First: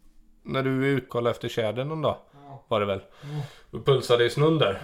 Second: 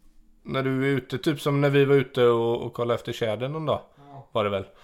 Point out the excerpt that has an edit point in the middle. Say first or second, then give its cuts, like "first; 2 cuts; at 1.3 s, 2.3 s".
first; 1 cut; at 1.1 s